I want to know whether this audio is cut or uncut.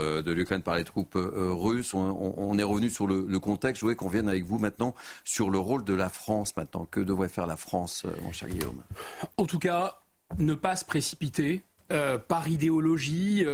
uncut